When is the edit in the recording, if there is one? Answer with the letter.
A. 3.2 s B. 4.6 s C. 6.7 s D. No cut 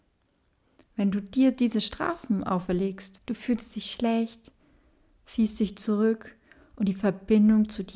A